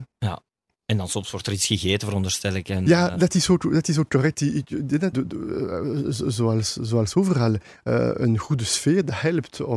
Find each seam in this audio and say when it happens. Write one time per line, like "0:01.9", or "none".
0:05.1